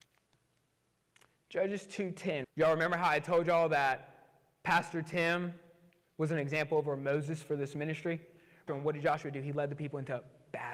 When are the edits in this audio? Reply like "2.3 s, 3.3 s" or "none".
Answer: 2.4 s, 8.7 s